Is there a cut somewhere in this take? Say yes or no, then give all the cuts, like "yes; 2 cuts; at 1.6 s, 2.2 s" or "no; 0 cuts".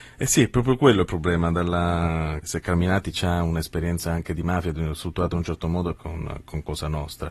yes; 2 cuts; at 2.4 s, 6.0 s